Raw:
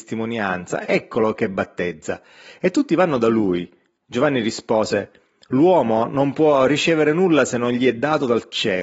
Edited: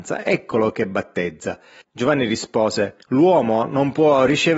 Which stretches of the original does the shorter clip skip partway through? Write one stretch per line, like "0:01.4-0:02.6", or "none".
0:02.4-0:04.0
0:05.2-0:05.4